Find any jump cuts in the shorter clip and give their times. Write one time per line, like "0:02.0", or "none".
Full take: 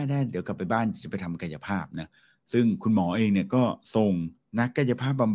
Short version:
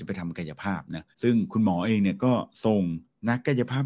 0:01.1